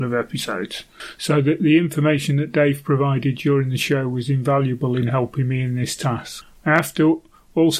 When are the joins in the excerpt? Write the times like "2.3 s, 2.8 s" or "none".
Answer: none